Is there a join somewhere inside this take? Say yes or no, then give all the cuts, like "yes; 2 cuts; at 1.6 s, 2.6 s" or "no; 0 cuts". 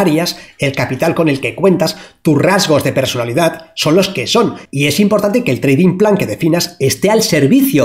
no; 0 cuts